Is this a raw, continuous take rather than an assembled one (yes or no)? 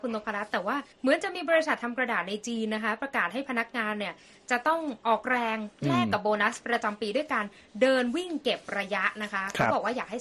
no